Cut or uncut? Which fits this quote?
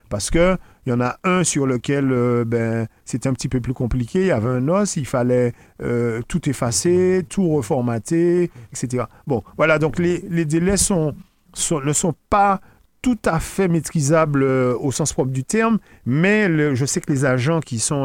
cut